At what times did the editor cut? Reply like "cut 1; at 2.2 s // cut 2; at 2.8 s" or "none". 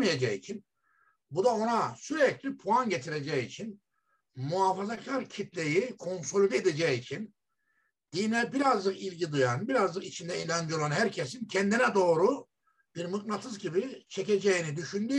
none